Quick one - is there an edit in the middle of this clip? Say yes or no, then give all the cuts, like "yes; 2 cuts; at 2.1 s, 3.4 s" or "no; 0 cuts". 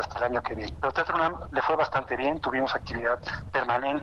no; 0 cuts